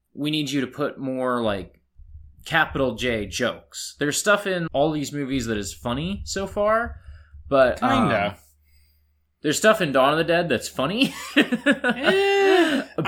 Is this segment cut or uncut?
cut